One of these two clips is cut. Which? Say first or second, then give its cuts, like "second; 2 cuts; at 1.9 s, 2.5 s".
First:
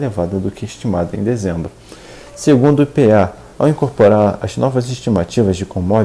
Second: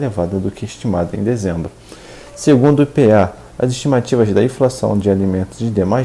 second; 1 cut; at 3.5 s